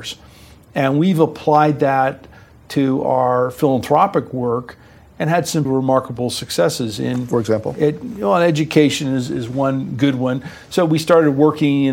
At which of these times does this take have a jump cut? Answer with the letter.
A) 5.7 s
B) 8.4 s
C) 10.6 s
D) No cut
A